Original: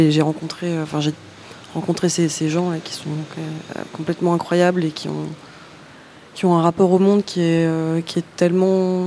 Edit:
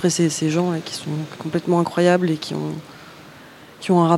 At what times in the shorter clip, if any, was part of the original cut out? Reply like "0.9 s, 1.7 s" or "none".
1.4 s